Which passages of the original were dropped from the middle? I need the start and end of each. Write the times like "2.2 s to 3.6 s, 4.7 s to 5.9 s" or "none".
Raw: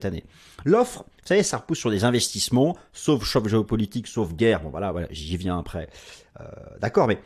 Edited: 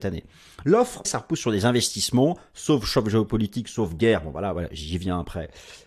1.0 s to 1.4 s